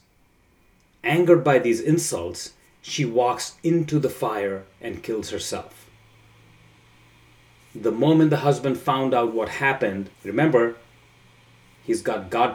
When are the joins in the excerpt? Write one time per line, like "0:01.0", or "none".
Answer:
0:10.1